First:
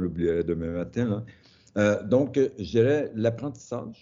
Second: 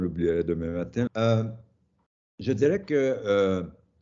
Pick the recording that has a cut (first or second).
second